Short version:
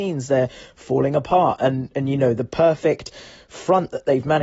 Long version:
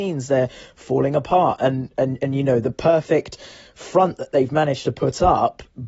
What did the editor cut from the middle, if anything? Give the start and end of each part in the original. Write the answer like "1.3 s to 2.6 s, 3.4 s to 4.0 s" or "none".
1.9 s to 2.2 s